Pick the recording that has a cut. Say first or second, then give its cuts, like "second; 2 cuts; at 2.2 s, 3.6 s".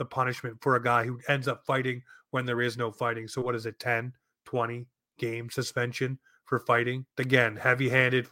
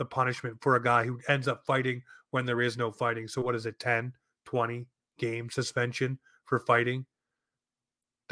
first; 1 cut; at 7.1 s